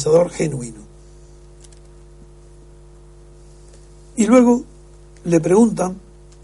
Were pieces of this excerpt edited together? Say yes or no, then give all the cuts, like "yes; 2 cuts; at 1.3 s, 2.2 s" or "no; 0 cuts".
no; 0 cuts